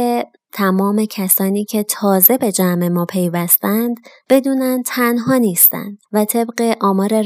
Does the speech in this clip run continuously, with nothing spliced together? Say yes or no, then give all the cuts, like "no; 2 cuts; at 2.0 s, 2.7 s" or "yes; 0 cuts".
no; 1 cut; at 6.1 s